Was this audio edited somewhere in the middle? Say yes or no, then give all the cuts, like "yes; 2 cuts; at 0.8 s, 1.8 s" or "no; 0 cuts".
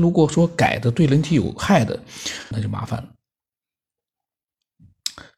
yes; 1 cut; at 2.5 s